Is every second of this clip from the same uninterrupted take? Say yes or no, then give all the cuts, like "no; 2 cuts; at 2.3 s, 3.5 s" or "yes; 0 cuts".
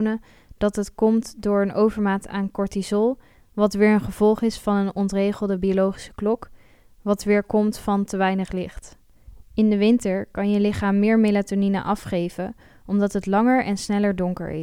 no; 1 cut; at 9.4 s